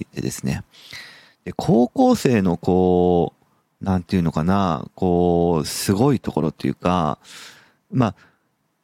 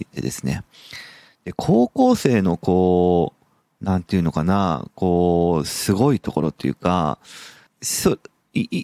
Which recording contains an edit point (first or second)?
second